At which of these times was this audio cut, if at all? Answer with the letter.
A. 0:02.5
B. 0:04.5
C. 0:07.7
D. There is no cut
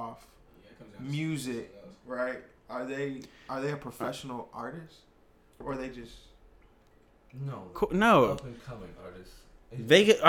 C